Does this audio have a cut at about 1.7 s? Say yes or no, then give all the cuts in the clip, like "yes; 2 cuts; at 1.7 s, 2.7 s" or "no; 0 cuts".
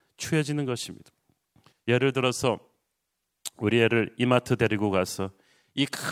yes; 1 cut; at 1.7 s